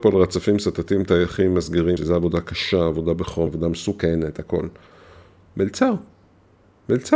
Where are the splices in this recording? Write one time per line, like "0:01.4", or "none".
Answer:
0:02.0
0:03.5